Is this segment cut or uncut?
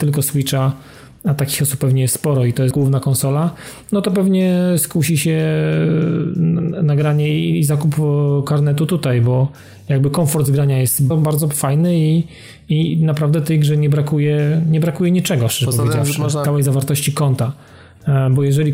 cut